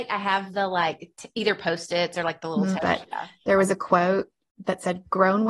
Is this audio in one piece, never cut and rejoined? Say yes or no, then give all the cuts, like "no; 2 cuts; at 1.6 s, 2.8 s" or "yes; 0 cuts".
no; 1 cut; at 2.8 s